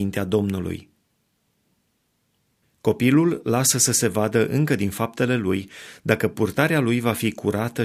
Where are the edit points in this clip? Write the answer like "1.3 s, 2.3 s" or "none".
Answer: none

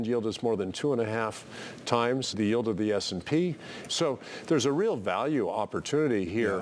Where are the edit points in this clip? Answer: 2.3 s, 3.9 s

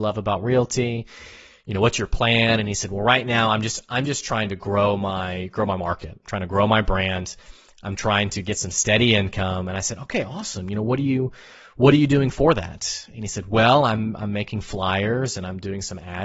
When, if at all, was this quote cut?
none

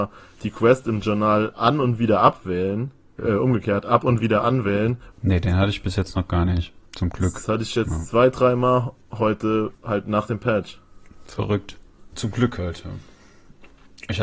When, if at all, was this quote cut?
5.1 s, 6.9 s, 12.1 s

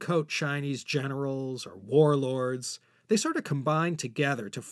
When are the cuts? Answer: none

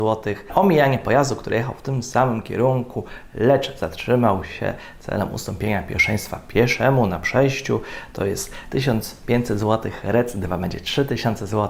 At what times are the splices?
none

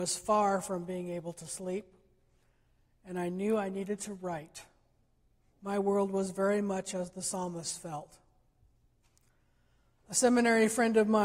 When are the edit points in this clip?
5.5 s

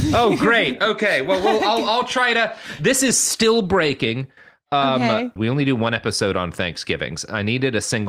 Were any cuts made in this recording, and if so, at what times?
5.4 s

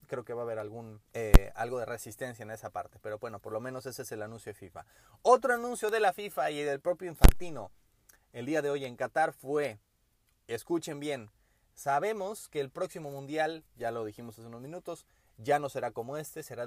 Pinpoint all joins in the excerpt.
1.1 s

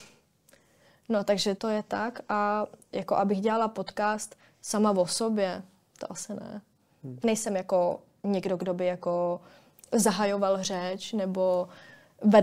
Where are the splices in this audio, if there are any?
1.6 s, 7.2 s

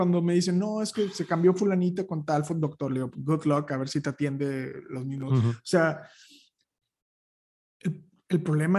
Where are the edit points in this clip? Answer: 3.1 s

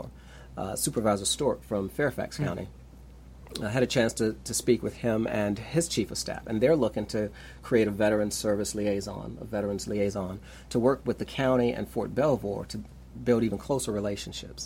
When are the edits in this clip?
none

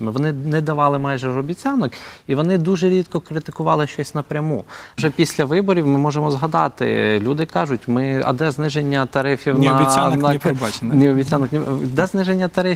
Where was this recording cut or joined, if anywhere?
5.0 s

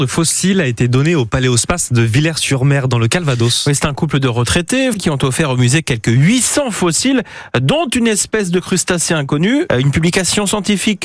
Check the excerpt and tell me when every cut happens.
4.9 s, 9.7 s

